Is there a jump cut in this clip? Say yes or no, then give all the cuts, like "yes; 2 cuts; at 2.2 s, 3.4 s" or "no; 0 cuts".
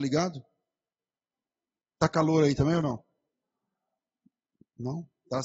no; 0 cuts